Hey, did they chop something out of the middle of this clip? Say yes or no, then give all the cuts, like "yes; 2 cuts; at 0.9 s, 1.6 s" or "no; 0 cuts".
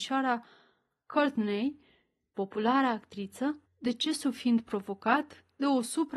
yes; 1 cut; at 3.6 s